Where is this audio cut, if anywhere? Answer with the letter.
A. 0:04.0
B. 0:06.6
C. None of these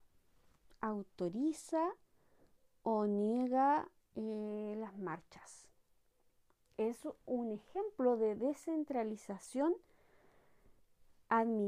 C